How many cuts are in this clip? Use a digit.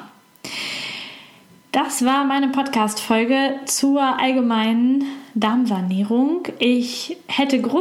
0